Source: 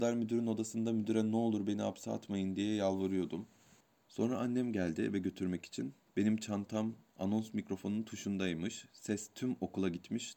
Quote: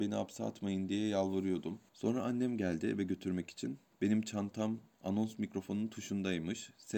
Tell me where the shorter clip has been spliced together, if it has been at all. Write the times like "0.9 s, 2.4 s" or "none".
1.9 s